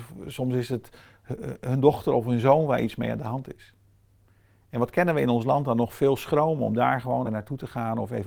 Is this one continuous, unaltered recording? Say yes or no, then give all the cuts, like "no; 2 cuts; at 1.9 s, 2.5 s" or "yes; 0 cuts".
no; 1 cut; at 7.2 s